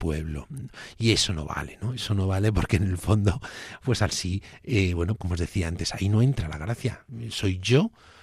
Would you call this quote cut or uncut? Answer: cut